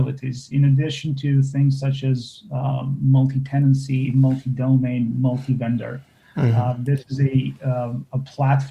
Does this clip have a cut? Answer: no; 0 cuts

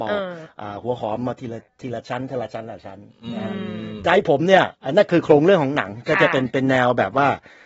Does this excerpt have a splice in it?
yes; 1 cut; at 4.7 s

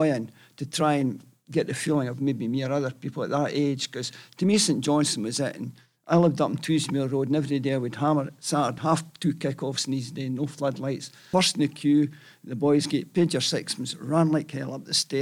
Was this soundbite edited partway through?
yes; 2 cuts; at 8.8 s, 11.3 s

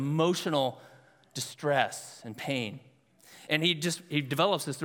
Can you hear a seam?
no; 0 cuts

